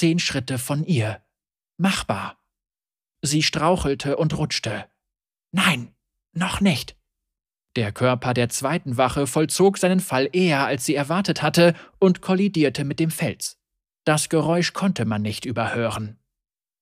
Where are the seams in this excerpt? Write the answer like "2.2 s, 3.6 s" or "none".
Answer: 3.1 s